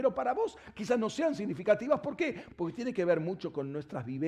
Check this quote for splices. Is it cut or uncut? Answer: cut